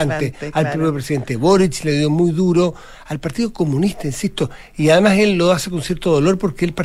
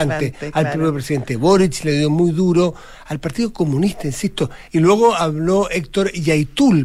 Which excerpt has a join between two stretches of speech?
second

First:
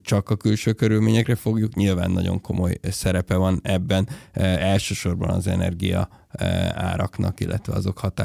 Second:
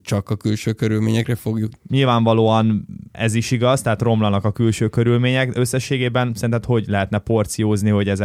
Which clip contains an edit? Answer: second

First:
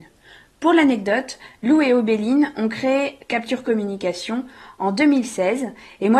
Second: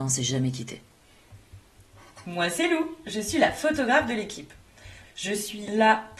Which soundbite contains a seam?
second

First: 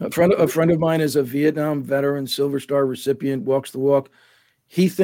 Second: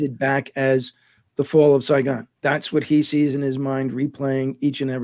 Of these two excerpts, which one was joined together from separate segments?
second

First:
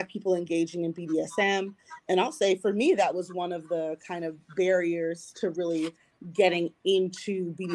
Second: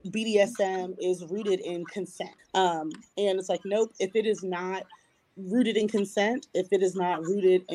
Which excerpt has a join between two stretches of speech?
second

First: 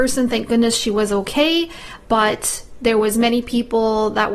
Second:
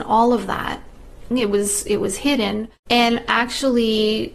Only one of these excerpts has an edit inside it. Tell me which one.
second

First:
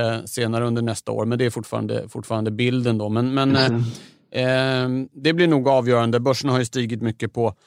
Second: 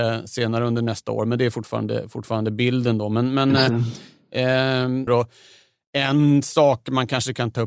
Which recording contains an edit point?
second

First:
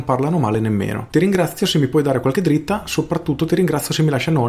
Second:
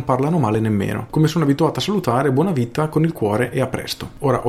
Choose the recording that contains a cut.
second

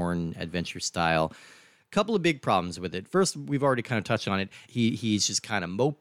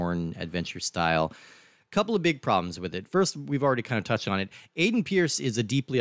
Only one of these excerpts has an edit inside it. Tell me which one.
first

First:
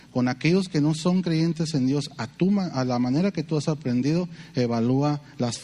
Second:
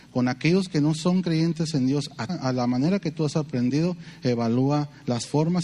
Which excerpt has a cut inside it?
second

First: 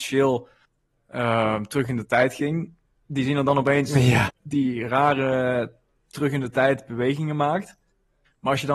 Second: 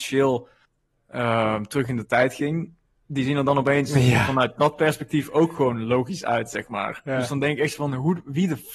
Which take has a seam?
first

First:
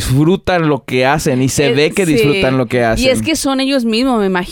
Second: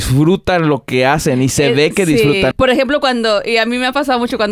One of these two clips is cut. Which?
second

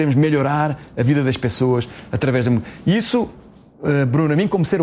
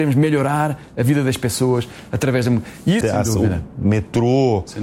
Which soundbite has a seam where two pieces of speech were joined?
second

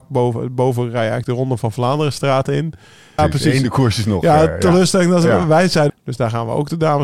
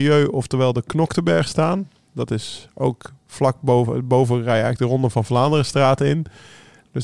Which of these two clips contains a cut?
first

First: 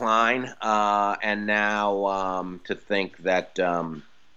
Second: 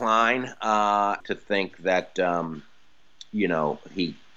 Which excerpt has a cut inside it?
second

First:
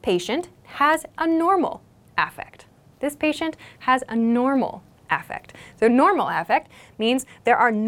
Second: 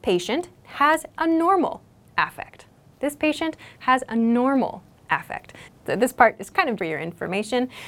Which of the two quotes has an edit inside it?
second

